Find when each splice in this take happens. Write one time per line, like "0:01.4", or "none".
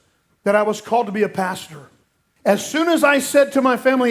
0:02.4